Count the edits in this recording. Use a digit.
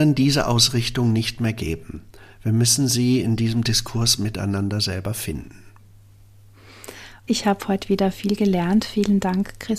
1